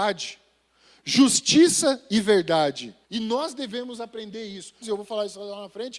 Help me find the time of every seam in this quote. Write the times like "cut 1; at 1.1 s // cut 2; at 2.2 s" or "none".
cut 1; at 3.0 s // cut 2; at 4.8 s